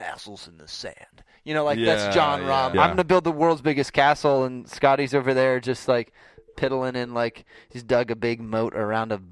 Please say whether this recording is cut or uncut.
cut